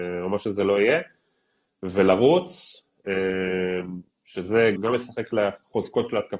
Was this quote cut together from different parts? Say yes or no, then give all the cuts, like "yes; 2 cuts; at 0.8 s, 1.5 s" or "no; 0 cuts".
yes; 1 cut; at 4.8 s